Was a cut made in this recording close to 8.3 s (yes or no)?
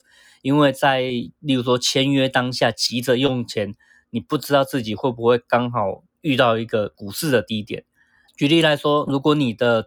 yes